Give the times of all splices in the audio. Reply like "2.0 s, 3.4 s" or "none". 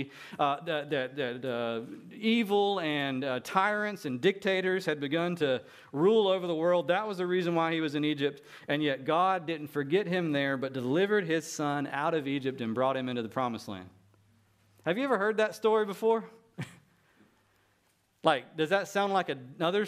none

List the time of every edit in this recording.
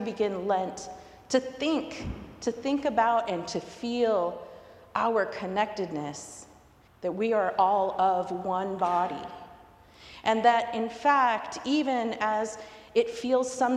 6.9 s

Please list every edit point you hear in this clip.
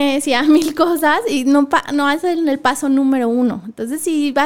none

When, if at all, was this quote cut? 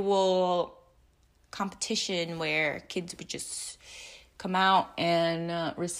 none

